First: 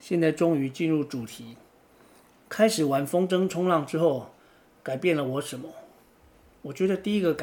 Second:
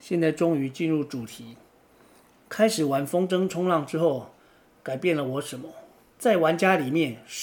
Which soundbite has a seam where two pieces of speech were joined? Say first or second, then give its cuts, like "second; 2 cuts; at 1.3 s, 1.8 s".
second; 1 cut; at 6.1 s